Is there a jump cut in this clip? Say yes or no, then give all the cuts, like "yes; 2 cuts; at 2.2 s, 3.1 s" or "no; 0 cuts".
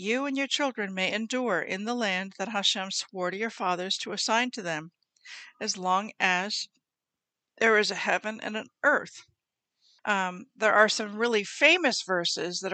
yes; 1 cut; at 10.0 s